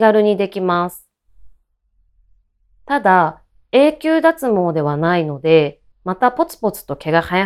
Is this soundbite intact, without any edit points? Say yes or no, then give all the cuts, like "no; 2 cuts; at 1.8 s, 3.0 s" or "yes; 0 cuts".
no; 1 cut; at 5.9 s